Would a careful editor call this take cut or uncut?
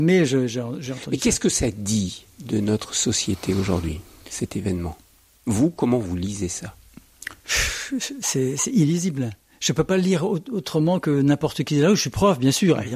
uncut